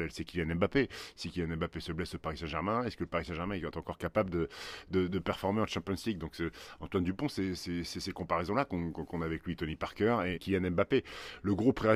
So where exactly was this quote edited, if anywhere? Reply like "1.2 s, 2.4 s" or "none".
5.1 s, 10.3 s